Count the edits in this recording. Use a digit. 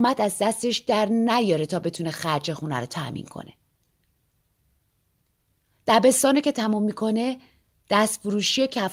0